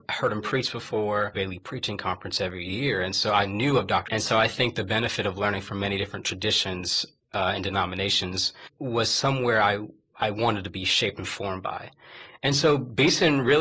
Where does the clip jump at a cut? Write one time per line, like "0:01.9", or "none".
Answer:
0:01.3
0:04.1